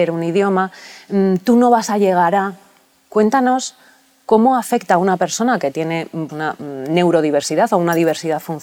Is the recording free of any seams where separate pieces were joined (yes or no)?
no